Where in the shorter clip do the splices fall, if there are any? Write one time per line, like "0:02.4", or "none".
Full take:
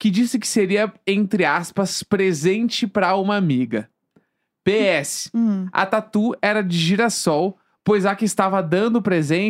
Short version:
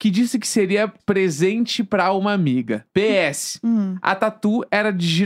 0:01.0
0:02.9